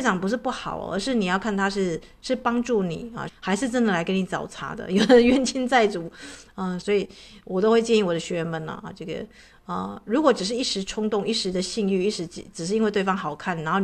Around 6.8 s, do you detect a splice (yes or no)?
yes